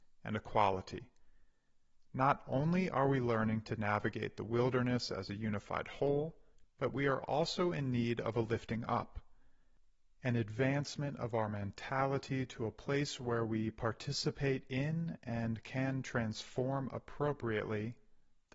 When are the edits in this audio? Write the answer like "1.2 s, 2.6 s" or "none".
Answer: 6.6 s